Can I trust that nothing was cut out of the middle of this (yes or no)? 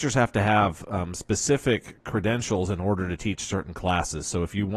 yes